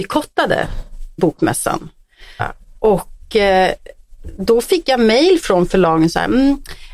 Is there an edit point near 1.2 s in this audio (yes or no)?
yes